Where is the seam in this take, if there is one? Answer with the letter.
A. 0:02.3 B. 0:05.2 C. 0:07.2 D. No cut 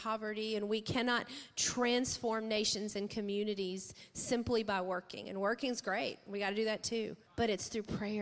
C